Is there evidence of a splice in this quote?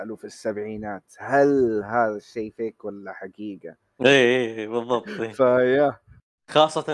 yes; 1 cut; at 4.0 s

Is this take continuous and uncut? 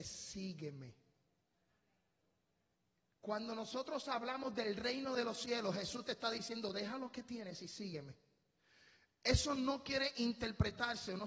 yes; 0 cuts

